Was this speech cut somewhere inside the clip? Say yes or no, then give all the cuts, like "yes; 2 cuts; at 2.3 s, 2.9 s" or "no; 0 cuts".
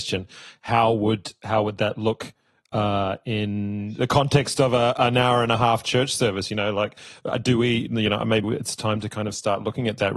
yes; 1 cut; at 8.4 s